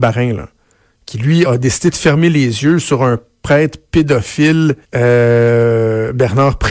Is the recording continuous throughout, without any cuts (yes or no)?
no